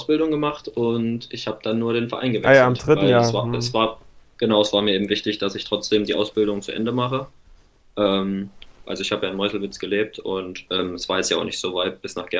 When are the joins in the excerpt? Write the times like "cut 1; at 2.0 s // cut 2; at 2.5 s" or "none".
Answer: cut 1; at 8.8 s // cut 2; at 10.7 s